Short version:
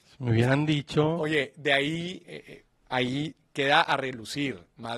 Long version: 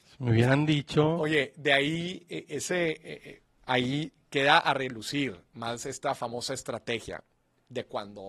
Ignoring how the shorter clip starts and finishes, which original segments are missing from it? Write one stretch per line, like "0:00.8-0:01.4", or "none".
0:02.2-0:03.0